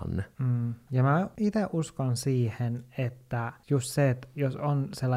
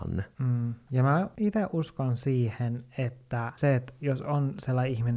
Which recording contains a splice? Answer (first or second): second